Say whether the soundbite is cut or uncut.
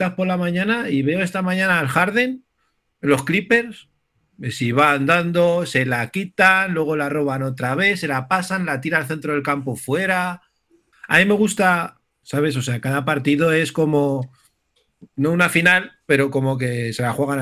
cut